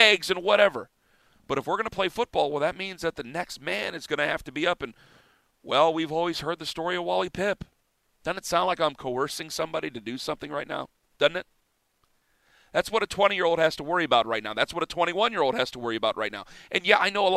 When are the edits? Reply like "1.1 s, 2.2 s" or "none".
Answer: none